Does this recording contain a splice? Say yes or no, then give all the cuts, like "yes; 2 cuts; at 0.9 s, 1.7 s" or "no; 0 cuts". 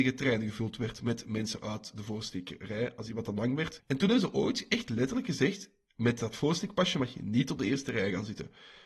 yes; 1 cut; at 3.8 s